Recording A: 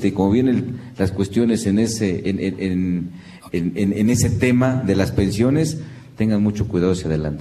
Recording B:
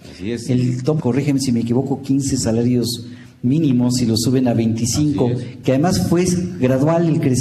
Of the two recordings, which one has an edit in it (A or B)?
B